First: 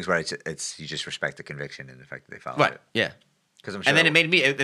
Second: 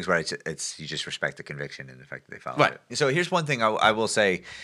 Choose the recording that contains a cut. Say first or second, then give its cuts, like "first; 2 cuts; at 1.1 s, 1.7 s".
second; 1 cut; at 2.9 s